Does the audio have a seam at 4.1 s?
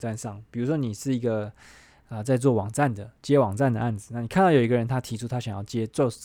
no; 0 cuts

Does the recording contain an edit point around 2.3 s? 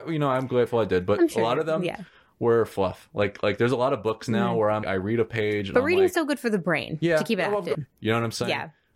no; 2 cuts; at 4.8 s, 7.7 s

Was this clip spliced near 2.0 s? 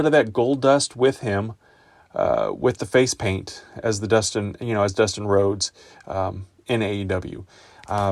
no; 0 cuts

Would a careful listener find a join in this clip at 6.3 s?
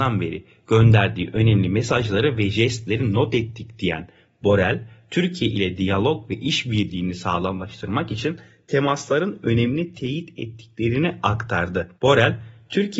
no; 1 cut; at 11.9 s

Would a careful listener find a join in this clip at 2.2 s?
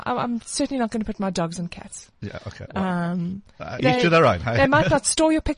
no; 1 cut; at 3.8 s

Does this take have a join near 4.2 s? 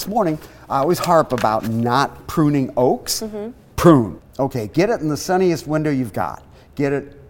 yes; 1 cut; at 4.2 s

